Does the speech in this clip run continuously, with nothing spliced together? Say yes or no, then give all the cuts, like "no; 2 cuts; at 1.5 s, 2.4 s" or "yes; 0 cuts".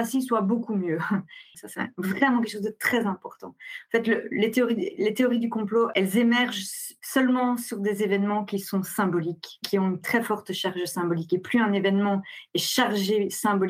no; 1 cut; at 1.5 s